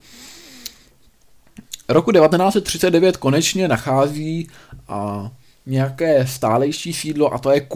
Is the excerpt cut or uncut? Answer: uncut